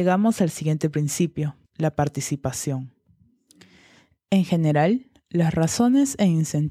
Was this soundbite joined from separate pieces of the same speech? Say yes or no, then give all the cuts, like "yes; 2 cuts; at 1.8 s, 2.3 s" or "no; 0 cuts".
yes; 1 cut; at 1.6 s